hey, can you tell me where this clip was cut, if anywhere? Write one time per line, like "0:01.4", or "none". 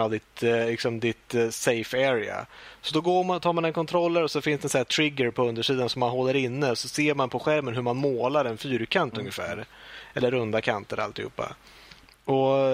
none